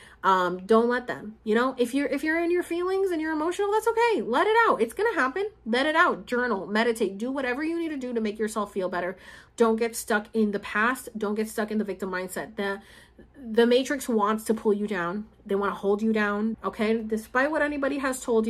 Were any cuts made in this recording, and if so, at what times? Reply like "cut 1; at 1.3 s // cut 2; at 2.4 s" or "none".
cut 1; at 9.5 s // cut 2; at 16.5 s